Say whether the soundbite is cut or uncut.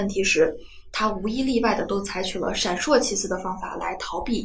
uncut